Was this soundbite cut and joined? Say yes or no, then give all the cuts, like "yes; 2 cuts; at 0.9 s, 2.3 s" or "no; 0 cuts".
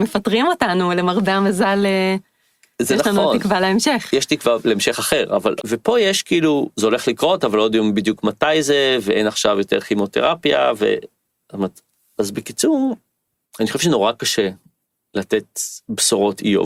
yes; 1 cut; at 5.6 s